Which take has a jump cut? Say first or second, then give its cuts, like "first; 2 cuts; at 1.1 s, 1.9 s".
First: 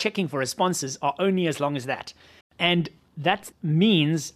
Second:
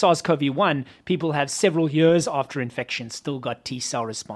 first; 1 cut; at 2.4 s